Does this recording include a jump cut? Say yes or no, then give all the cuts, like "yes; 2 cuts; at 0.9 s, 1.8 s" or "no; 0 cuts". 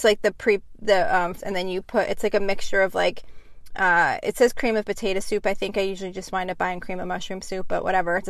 yes; 1 cut; at 1.4 s